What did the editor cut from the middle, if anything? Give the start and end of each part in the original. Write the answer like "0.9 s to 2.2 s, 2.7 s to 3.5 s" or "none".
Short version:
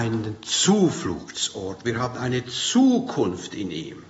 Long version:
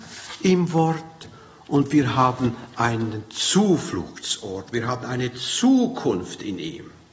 none